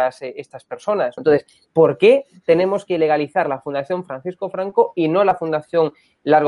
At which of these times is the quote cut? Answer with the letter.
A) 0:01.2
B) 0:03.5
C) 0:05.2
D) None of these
A